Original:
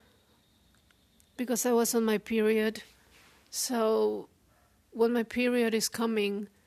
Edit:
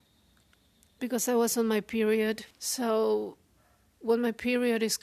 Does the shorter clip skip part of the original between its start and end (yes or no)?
yes